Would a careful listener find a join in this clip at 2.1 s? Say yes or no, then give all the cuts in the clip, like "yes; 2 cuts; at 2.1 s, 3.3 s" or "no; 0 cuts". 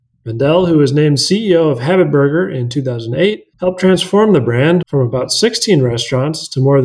no; 2 cuts; at 3.5 s, 4.8 s